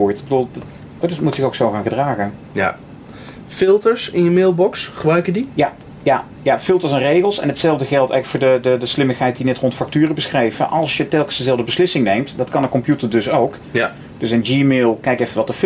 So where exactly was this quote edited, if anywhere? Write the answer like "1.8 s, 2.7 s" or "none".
1.0 s